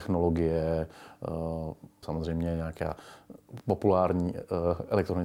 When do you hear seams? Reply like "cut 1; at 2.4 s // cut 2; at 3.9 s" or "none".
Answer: cut 1; at 2.0 s